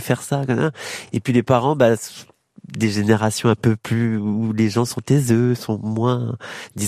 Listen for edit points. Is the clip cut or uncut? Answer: uncut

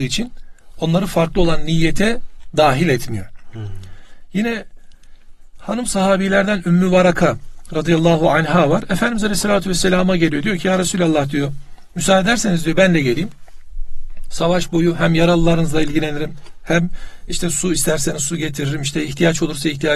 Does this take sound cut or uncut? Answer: uncut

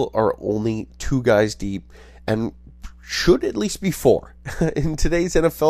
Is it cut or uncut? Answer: uncut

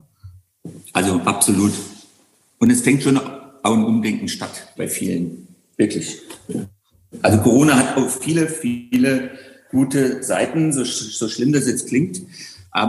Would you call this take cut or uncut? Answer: cut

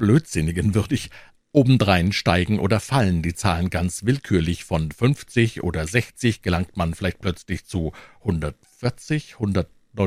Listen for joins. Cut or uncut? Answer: cut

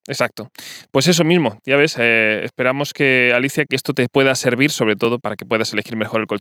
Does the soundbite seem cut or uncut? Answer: cut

